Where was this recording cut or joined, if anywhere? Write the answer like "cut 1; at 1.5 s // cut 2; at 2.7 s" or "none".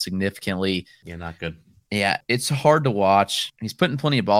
cut 1; at 1.0 s // cut 2; at 2.2 s